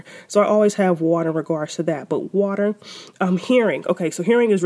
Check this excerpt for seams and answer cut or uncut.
uncut